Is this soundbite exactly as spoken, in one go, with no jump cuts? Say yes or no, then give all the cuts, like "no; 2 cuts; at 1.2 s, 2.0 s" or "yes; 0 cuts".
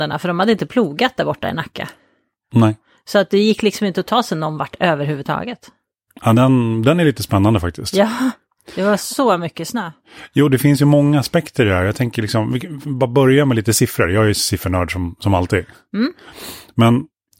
yes; 0 cuts